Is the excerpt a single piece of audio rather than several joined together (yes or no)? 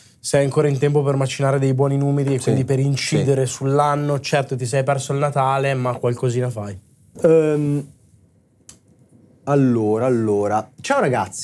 no